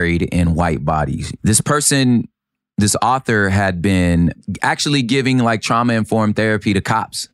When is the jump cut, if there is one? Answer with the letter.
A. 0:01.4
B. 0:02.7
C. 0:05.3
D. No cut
A